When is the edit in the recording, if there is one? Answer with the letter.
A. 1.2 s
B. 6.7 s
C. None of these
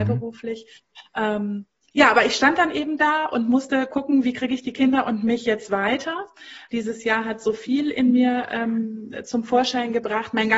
B